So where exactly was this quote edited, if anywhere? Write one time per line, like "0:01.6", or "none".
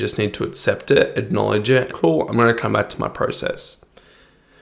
0:01.9